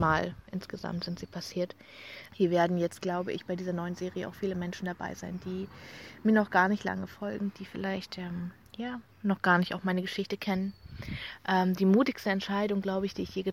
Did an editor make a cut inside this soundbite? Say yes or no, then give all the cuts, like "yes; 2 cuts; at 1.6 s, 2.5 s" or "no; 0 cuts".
yes; 2 cuts; at 2.3 s, 9.1 s